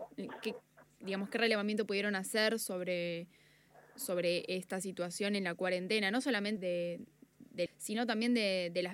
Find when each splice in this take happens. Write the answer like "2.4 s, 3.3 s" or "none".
6.6 s, 7.7 s